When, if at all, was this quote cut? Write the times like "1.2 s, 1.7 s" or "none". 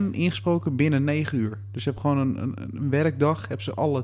none